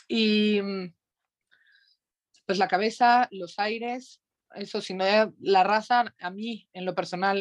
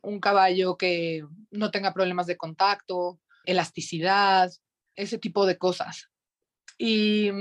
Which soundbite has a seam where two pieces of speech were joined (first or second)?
second